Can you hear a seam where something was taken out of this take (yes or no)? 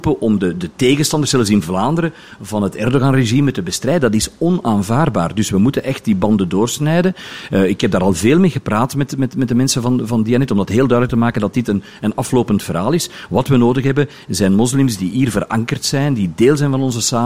no